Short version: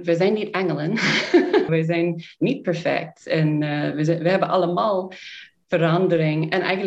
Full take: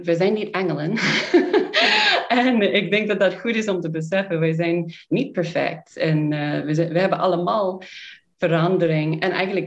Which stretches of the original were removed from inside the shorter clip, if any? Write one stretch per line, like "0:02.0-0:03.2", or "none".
0:01.7-0:04.4